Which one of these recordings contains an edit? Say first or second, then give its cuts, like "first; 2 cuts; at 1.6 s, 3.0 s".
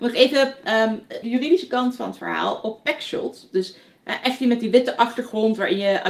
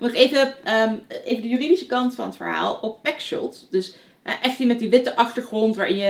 first; 1 cut; at 1.2 s